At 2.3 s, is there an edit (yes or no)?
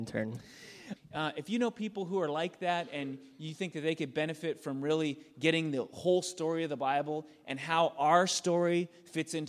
no